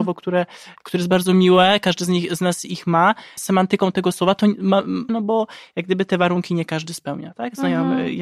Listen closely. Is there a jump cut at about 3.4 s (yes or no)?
yes